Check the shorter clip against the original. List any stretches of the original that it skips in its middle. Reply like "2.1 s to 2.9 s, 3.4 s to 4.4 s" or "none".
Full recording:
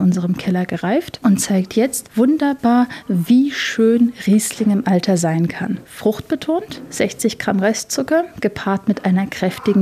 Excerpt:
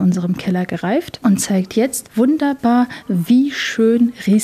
none